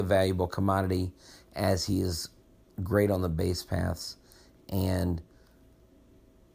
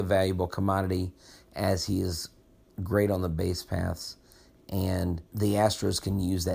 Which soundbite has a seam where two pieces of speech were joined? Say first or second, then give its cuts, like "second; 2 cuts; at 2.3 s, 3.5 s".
second; 1 cut; at 5.3 s